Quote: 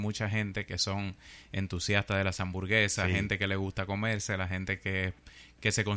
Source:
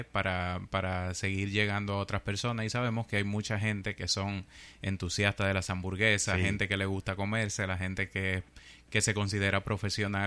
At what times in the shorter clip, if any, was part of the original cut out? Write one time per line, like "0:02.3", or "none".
none